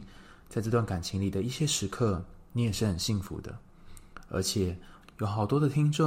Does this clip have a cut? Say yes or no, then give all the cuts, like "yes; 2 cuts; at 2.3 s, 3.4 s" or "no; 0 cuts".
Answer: yes; 1 cut; at 5.0 s